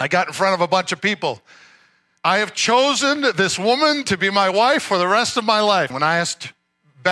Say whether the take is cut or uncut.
cut